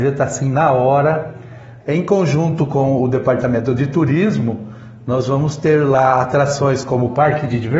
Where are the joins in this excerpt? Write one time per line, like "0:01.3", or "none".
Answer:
0:01.8